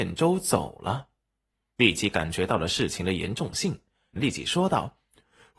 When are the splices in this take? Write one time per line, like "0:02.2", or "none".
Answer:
0:01.7
0:04.2